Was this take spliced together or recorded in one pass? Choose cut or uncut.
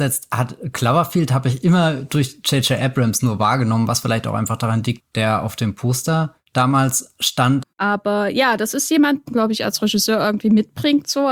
cut